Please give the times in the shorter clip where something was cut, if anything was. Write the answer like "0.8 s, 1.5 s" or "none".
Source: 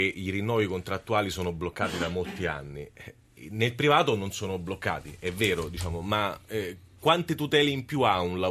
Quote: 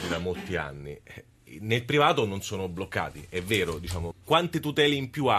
4.1 s